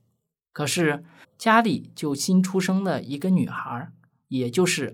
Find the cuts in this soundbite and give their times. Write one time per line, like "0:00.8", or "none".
0:01.2